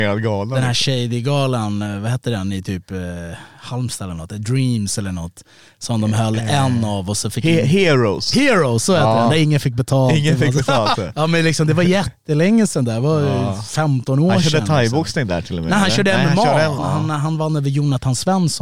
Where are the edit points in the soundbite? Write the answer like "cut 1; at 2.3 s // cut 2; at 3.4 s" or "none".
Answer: cut 1; at 11.0 s // cut 2; at 16.8 s